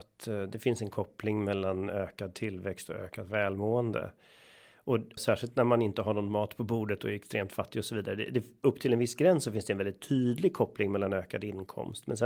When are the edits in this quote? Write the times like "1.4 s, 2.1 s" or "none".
5.2 s